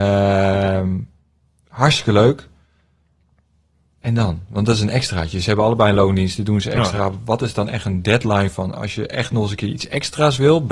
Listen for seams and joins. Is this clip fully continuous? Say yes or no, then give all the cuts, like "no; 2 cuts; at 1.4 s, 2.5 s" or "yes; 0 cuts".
yes; 0 cuts